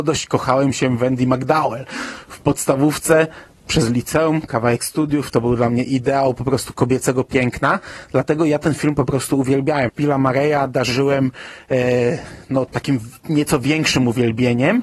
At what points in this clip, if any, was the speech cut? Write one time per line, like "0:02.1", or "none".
0:09.9
0:12.7